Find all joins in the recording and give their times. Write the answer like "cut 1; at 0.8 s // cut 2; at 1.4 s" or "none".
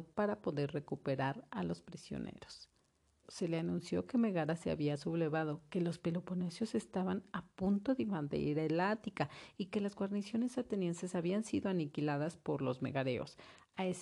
cut 1; at 3.2 s